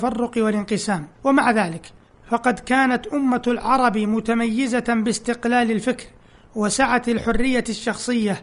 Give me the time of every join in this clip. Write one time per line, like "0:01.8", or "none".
0:01.1